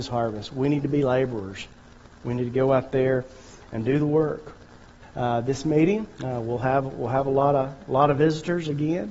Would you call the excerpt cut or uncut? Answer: cut